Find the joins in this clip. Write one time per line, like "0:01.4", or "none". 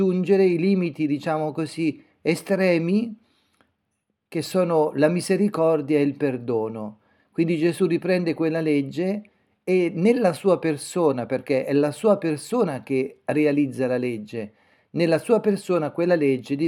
none